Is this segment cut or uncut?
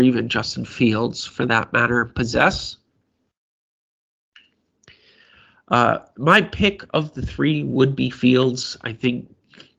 uncut